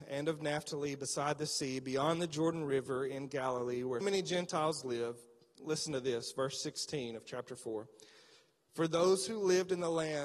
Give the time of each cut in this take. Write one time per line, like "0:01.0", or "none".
0:04.0
0:08.6